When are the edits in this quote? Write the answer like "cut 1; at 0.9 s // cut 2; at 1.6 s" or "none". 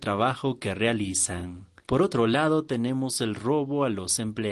cut 1; at 1.8 s